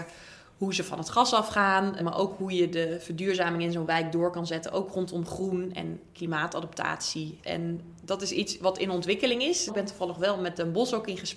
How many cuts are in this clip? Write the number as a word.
three